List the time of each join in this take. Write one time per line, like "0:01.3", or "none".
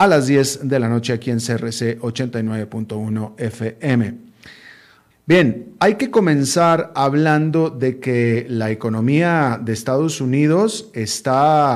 0:05.1